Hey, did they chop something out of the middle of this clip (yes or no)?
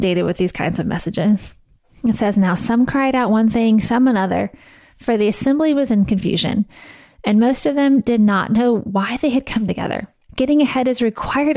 yes